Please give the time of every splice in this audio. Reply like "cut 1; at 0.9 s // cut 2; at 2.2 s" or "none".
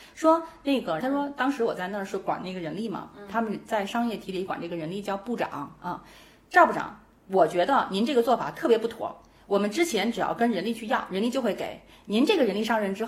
cut 1; at 1.0 s